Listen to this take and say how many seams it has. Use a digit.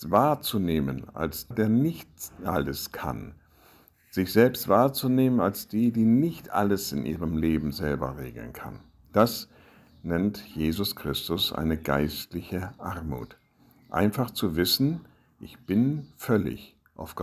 1